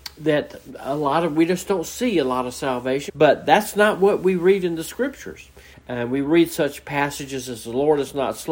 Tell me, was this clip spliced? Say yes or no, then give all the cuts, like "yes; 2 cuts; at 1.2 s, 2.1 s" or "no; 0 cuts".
yes; 2 cuts; at 3.1 s, 5.7 s